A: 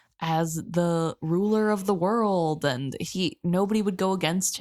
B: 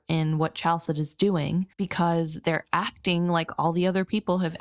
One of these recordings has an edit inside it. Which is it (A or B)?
B